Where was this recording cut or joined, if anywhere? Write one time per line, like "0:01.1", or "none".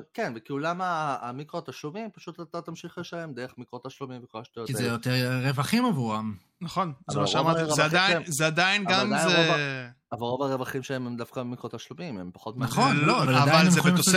0:13.3